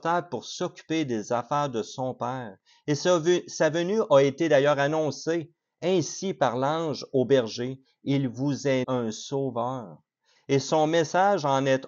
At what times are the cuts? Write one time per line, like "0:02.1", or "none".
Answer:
0:08.8
0:10.4